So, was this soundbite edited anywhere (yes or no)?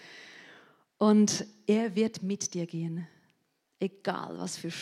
no